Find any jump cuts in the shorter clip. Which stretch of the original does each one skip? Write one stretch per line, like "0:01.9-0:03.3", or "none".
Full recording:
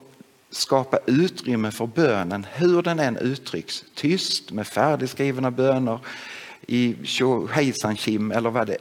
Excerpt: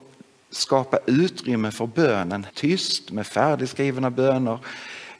0:02.5-0:03.9